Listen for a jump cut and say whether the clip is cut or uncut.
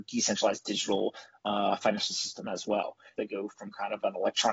cut